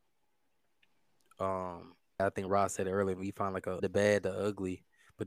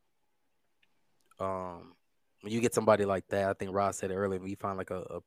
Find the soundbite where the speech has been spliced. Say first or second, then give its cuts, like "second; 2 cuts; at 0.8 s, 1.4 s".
first; 2 cuts; at 2.2 s, 3.8 s